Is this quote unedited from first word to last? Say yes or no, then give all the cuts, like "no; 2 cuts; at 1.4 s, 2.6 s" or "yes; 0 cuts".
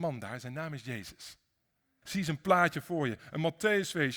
no; 1 cut; at 2.0 s